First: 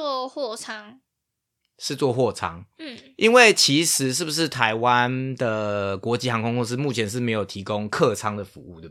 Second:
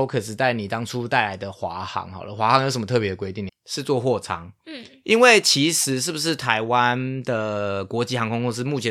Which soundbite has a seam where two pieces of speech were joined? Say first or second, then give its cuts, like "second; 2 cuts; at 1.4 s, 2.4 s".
second; 1 cut; at 3.5 s